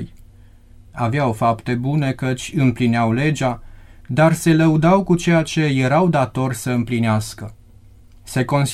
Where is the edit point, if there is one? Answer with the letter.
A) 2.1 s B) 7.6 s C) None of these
C